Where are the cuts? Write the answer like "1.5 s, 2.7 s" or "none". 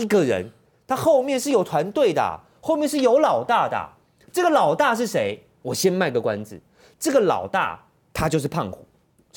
none